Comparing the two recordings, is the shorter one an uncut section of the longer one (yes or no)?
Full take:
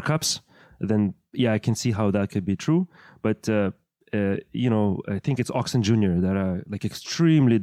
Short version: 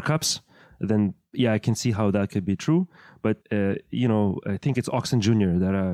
no